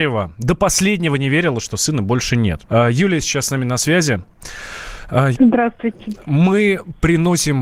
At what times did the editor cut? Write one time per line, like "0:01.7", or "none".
0:02.7
0:05.3